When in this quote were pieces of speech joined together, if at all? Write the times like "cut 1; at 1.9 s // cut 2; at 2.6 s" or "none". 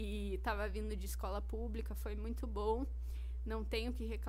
none